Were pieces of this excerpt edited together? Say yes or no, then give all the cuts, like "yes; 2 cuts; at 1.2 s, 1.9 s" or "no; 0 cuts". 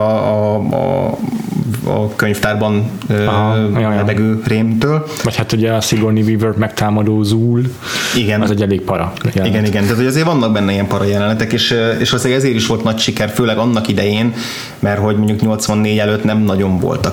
no; 0 cuts